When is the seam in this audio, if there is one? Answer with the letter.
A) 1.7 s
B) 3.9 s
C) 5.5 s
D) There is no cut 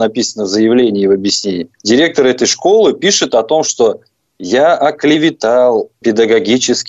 D